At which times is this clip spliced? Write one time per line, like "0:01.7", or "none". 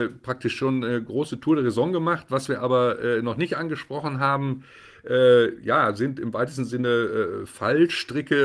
none